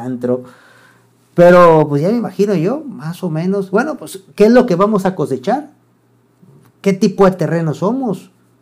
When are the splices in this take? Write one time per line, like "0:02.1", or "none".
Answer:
none